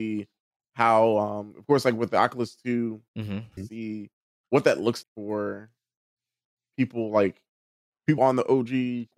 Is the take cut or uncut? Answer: cut